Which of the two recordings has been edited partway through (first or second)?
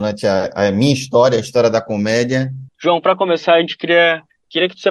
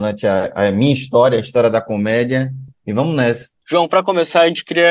first